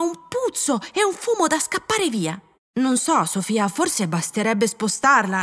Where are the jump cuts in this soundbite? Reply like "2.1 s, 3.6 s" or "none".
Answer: 2.5 s